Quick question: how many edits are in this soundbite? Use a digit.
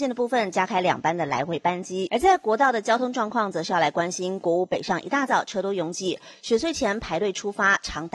1